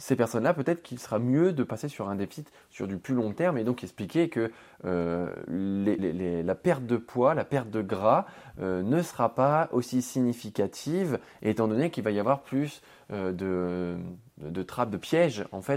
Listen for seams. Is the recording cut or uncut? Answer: cut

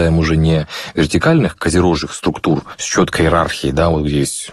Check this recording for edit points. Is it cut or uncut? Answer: uncut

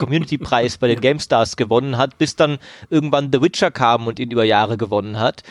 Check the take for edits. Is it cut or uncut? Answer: uncut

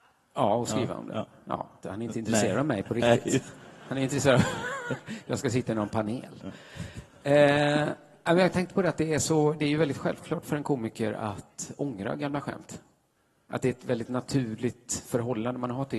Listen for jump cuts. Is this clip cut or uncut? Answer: cut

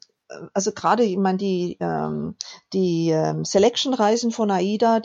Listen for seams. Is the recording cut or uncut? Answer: uncut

